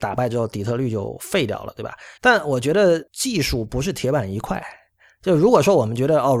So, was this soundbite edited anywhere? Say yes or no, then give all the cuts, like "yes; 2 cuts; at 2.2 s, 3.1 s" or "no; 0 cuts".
yes; 1 cut; at 2.2 s